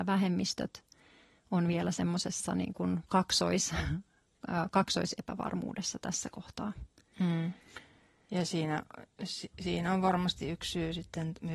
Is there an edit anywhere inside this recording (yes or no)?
no